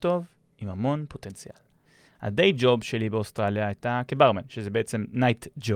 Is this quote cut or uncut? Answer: uncut